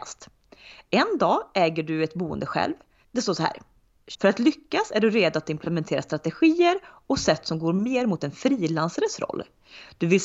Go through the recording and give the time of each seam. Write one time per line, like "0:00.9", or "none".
0:03.0
0:04.1